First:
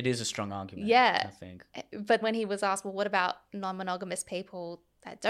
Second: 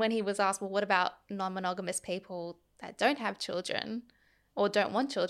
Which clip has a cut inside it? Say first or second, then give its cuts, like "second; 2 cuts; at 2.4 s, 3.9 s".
first; 1 cut; at 2.2 s